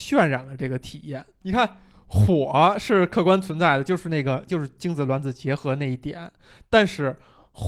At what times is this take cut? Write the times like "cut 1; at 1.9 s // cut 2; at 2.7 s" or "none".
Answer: cut 1; at 1.4 s // cut 2; at 4.5 s